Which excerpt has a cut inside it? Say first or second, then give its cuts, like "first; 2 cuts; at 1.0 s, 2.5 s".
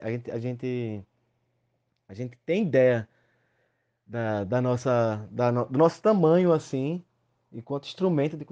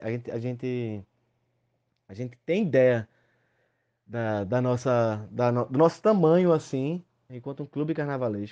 second; 1 cut; at 7.3 s